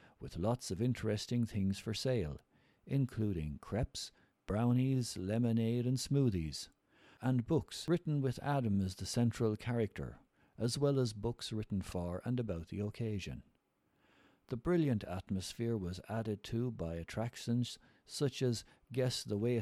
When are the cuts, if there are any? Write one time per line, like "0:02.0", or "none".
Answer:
0:04.3